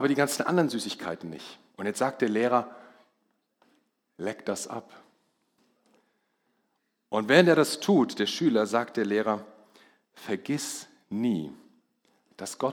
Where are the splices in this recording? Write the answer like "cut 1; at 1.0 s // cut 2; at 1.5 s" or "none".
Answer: cut 1; at 1.7 s